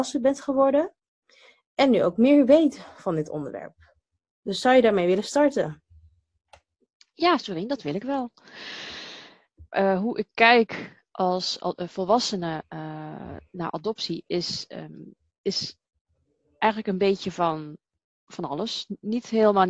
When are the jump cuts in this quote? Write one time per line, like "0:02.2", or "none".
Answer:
0:09.7